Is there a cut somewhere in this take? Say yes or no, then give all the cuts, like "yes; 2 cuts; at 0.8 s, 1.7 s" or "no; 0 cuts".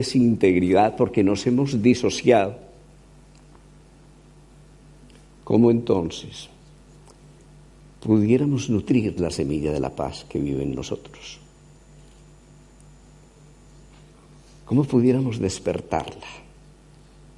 no; 0 cuts